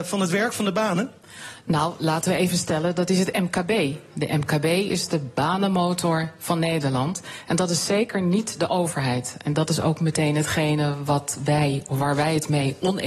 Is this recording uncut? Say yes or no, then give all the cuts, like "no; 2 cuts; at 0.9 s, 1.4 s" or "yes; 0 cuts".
yes; 0 cuts